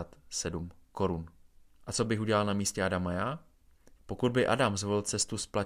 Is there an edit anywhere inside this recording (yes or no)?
yes